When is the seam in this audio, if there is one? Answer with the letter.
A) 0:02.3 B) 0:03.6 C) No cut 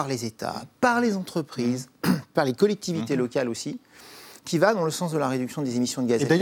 A